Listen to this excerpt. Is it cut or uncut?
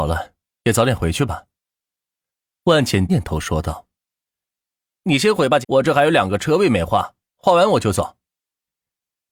cut